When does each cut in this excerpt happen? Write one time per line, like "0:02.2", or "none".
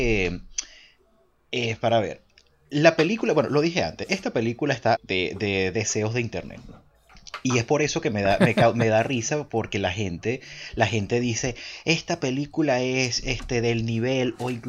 0:05.0